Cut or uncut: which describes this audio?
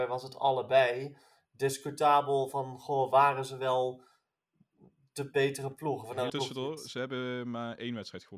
cut